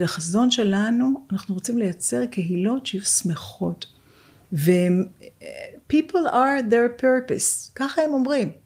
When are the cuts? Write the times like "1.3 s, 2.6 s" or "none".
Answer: 4.4 s